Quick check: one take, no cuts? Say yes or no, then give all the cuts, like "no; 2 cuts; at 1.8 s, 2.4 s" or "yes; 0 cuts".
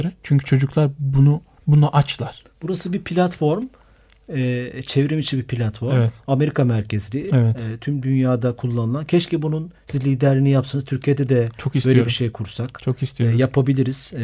yes; 0 cuts